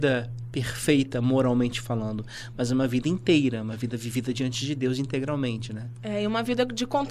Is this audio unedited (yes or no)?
yes